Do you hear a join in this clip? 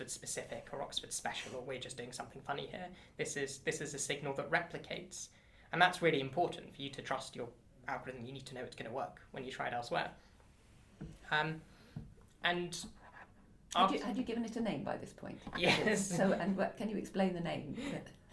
no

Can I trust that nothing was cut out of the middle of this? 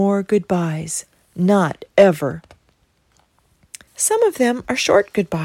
no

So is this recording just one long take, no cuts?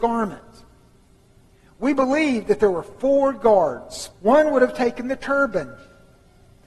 no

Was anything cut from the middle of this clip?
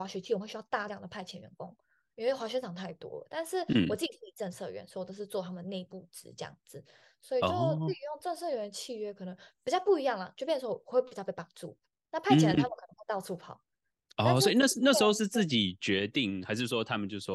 no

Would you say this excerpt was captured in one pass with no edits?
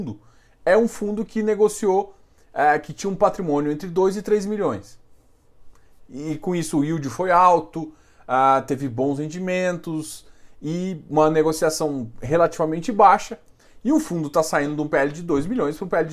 yes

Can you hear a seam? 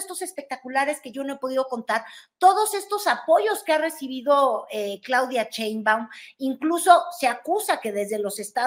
no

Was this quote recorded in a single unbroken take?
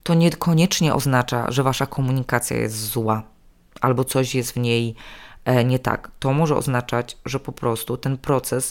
yes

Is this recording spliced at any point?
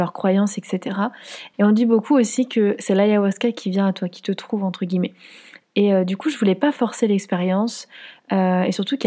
yes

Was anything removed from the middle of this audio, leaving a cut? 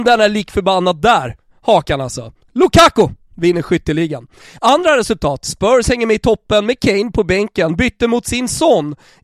no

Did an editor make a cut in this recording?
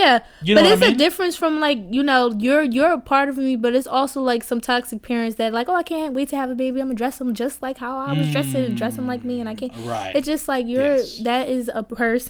no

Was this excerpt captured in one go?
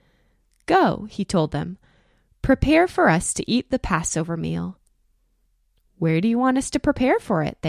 yes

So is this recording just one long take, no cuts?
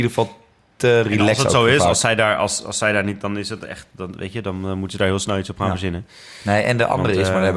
yes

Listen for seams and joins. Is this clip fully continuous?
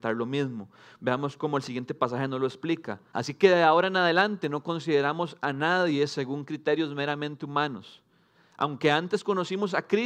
no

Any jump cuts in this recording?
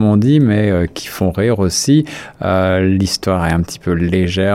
no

